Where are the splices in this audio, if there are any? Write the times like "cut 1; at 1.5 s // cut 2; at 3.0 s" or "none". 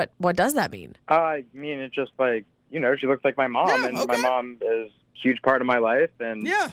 cut 1; at 1.0 s